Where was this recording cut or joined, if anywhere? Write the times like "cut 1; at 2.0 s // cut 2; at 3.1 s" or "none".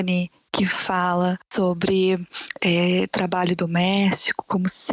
cut 1; at 1.4 s